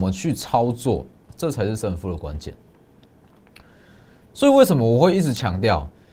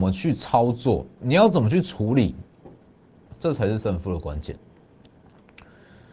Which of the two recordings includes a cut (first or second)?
first